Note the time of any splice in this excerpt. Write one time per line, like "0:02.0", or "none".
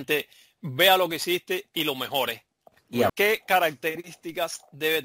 0:03.1

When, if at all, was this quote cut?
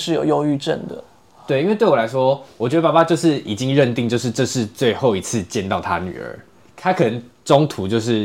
none

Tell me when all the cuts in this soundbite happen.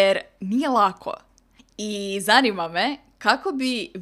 0:01.6

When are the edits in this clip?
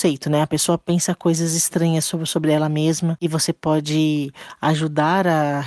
none

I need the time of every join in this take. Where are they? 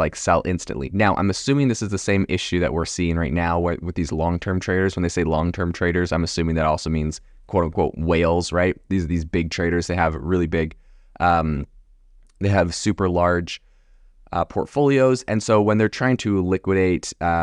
none

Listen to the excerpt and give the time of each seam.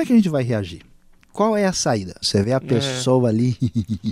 0:02.2

